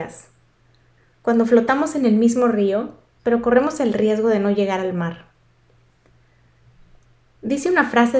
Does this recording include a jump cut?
yes; 2 cuts; at 1.0 s, 3.2 s

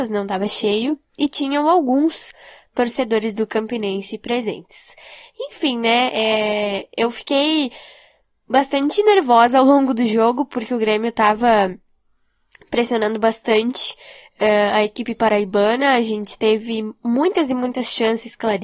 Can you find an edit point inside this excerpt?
no; 0 cuts

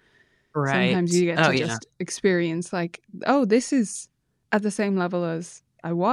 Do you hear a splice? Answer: no; 0 cuts

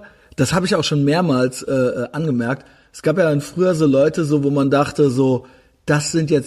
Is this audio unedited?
yes; 0 cuts

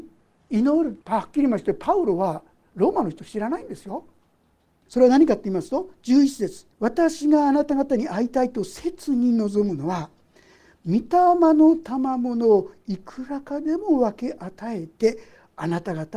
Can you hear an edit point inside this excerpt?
yes; 3 cuts; at 1.0 s, 4.8 s, 6.7 s

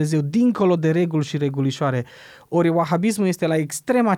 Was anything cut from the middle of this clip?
no; 0 cuts

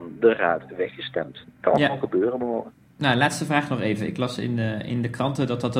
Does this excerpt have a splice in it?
no; 0 cuts

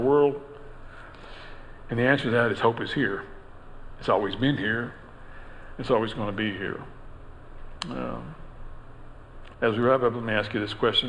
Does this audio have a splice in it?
yes; 1 cut; at 9.5 s

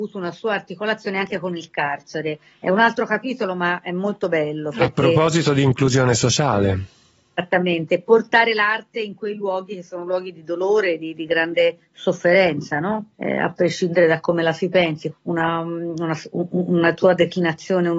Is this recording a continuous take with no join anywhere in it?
no; 2 cuts; at 13.1 s, 15.1 s

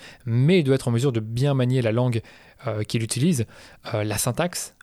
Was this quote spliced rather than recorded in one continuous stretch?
no; 0 cuts

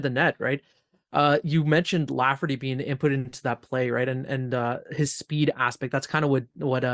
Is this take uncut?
yes; 0 cuts

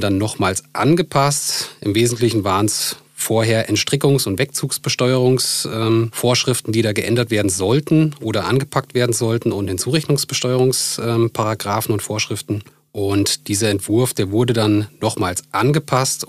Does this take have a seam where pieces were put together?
no; 0 cuts

